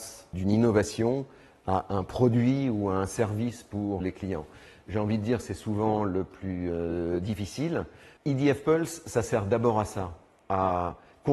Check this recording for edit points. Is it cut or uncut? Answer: cut